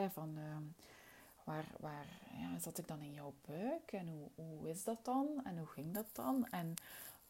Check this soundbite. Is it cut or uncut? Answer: uncut